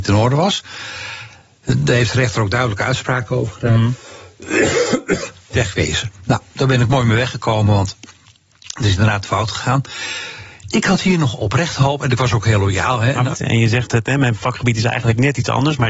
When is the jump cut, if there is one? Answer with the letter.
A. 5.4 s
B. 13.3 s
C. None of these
B